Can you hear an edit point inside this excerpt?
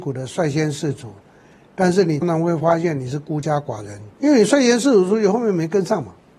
yes; 2 cuts; at 2.2 s, 4.1 s

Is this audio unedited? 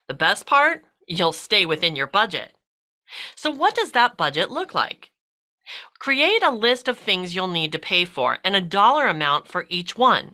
yes; 0 cuts

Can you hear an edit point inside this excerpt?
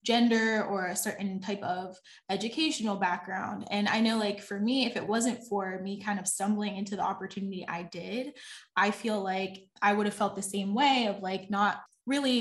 no; 0 cuts

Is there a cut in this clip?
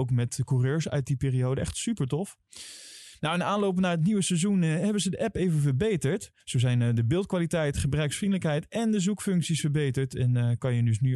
yes; 1 cut; at 6.4 s

